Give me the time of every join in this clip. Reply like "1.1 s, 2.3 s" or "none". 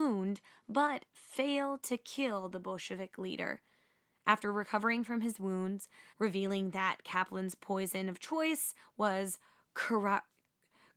6.1 s